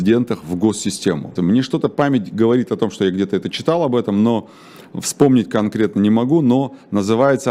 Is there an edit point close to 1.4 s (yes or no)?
yes